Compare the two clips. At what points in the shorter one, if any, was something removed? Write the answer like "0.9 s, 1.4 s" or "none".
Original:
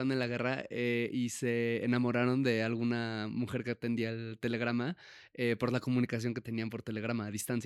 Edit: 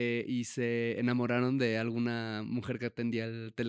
none